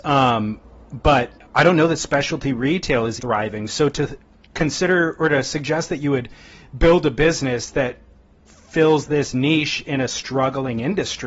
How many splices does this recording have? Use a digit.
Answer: 1